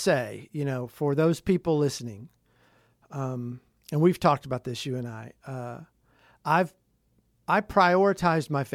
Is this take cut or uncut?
uncut